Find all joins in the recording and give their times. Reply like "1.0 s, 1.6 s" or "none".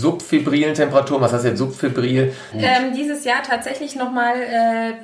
2.5 s

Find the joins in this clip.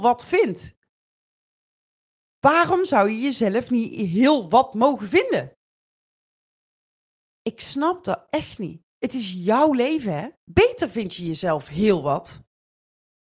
8.9 s, 10.4 s

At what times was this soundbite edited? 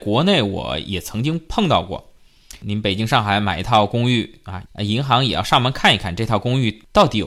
4.7 s

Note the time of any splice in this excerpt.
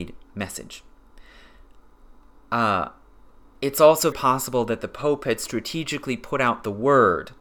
2.4 s, 4.1 s

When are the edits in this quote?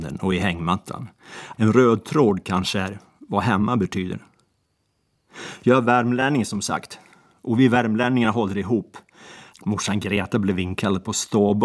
1.5 s, 9.5 s

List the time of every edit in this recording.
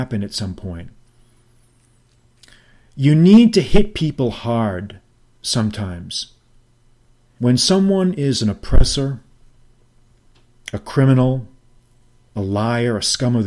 7.4 s

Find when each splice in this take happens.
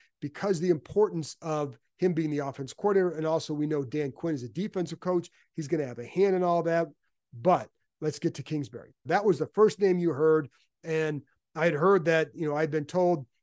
9.1 s

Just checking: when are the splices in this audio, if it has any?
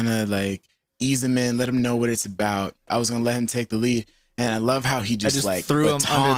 2.9 s

